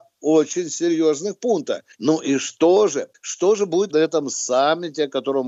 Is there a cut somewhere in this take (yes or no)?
yes